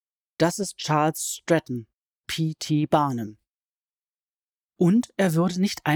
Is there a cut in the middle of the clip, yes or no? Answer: yes